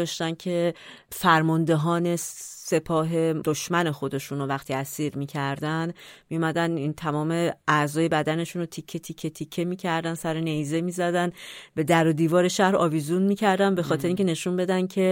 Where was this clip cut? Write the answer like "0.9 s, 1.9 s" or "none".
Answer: none